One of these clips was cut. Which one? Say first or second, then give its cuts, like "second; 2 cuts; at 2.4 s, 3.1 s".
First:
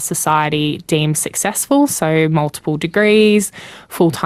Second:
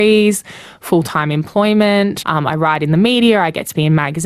second; 1 cut; at 2.2 s